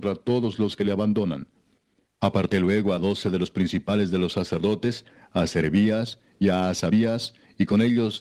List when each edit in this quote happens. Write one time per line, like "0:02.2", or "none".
0:02.0